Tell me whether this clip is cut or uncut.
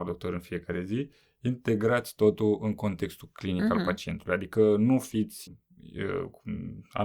cut